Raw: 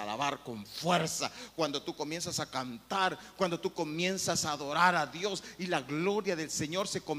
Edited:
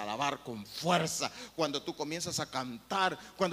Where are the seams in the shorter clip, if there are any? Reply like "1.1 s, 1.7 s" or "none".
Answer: none